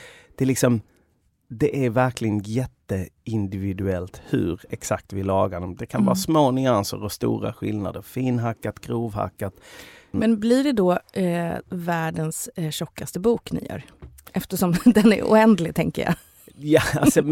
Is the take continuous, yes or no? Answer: no